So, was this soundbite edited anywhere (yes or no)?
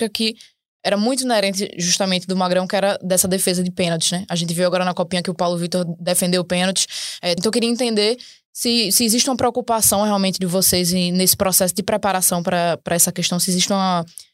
yes